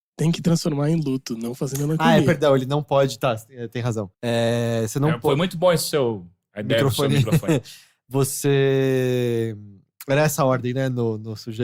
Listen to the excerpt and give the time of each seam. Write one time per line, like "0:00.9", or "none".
0:04.1